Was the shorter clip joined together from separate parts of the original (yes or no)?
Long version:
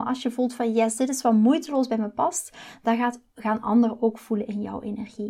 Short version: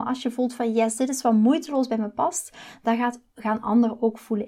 no